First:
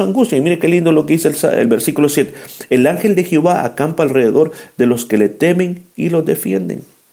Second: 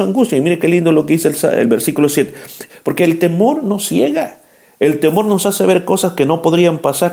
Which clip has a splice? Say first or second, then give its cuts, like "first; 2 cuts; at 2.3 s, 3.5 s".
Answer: second; 1 cut; at 2.7 s